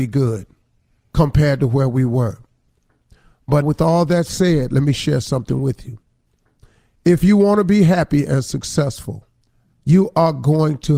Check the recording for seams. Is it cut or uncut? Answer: cut